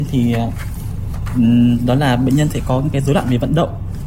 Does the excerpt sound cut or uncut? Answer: uncut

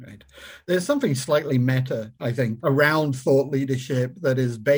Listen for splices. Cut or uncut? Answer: cut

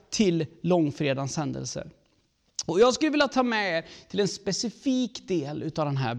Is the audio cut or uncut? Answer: uncut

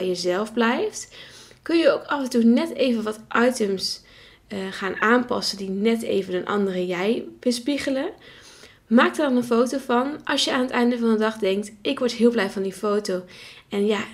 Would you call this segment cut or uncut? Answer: uncut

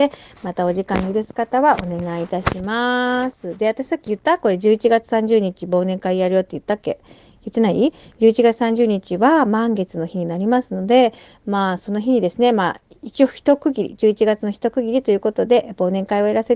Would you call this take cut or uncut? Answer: uncut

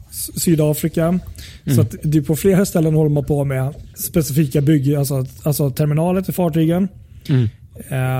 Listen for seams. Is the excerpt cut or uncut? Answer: cut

